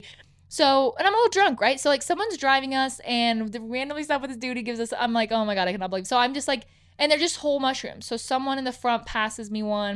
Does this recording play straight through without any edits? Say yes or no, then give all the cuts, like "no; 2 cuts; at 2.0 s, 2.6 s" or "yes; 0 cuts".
yes; 0 cuts